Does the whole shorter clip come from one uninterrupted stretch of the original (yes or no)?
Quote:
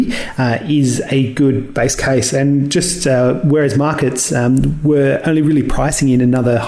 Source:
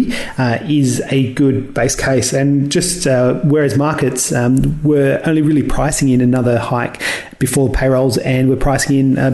yes